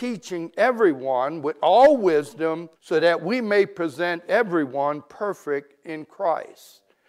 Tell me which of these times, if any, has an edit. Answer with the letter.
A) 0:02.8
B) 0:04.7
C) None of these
A